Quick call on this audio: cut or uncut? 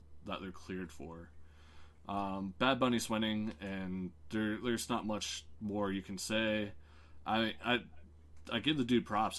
uncut